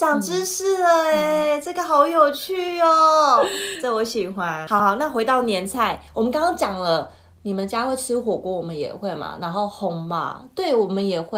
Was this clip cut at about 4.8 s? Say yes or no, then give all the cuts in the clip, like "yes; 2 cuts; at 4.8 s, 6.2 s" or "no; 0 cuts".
yes; 1 cut; at 4.8 s